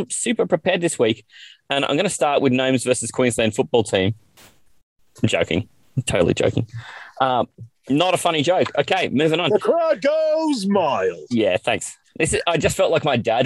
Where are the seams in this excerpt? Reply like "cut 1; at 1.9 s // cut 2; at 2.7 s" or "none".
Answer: none